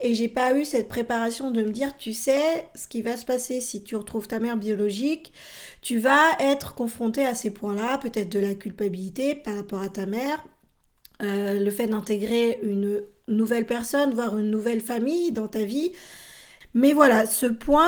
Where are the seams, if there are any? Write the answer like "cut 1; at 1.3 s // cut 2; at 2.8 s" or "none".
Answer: none